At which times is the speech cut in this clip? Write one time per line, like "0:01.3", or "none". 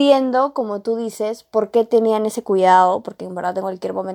none